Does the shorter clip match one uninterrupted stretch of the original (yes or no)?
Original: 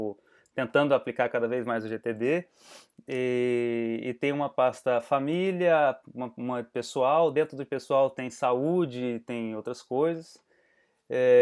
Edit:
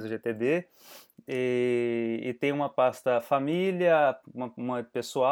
yes